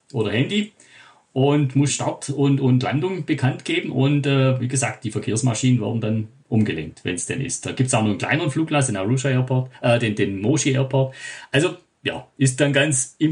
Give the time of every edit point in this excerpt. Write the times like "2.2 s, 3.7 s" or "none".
1.9 s